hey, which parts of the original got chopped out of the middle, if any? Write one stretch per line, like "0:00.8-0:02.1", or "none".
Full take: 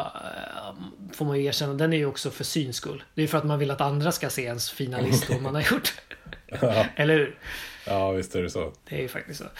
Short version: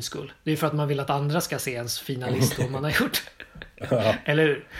none